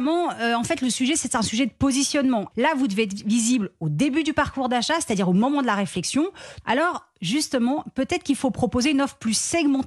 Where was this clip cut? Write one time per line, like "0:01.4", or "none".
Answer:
0:02.5
0:06.6

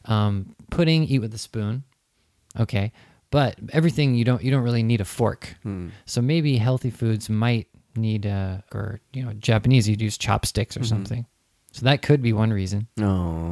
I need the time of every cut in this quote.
0:08.7

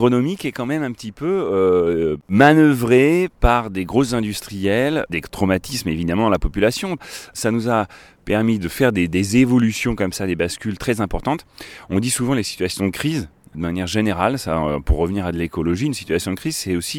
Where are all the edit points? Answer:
0:05.1

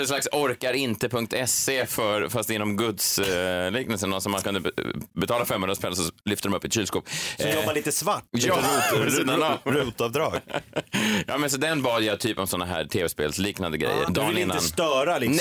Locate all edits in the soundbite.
0:14.1

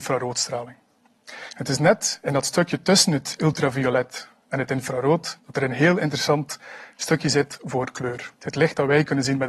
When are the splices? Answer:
0:08.4

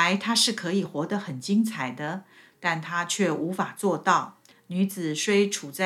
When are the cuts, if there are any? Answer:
0:04.5

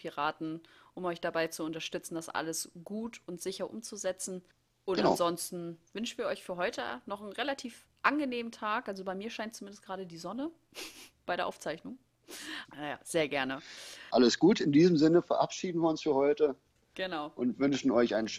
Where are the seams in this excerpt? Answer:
0:05.9
0:12.6
0:14.1

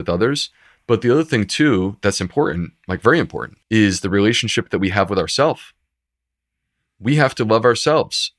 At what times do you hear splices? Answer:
0:03.6

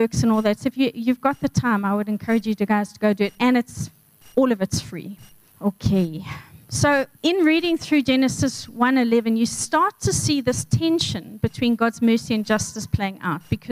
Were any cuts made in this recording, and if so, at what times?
0:05.5
0:07.1

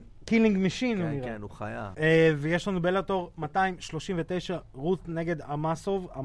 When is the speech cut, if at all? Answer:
0:01.9

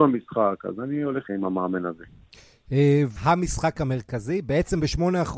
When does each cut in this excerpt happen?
0:01.3
0:03.2

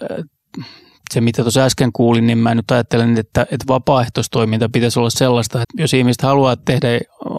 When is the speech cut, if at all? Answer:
0:05.6

